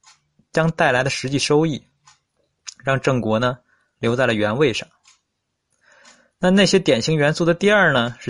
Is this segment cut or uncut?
uncut